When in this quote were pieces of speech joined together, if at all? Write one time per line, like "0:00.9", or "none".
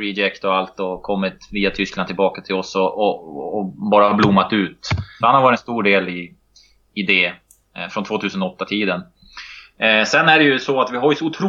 0:05.2